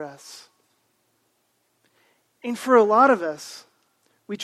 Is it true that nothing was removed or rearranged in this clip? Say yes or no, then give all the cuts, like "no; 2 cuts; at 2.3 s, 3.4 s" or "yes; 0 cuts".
yes; 0 cuts